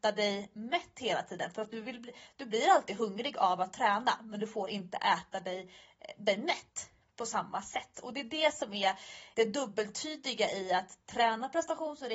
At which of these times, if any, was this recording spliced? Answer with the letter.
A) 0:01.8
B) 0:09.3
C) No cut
B